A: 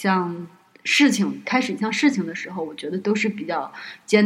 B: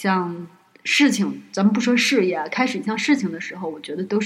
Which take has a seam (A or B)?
A